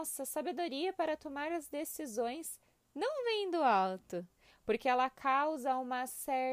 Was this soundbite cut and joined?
no; 0 cuts

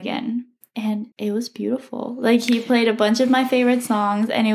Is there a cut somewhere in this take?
yes; 1 cut; at 1.1 s

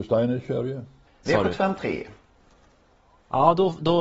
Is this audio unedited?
no; 1 cut; at 1.2 s

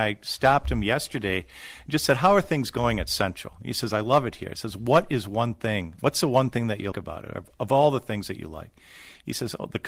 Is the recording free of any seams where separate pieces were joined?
no; 1 cut; at 6.9 s

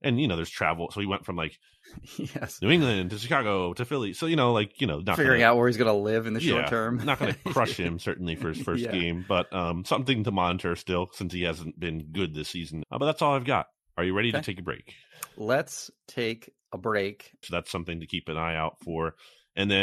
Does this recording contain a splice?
yes; 2 cuts; at 12.8 s, 17.4 s

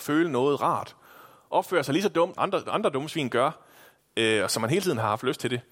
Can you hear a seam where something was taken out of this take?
yes; 2 cuts; at 2.3 s, 4.0 s

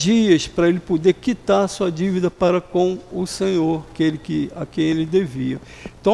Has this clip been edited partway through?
no; 0 cuts

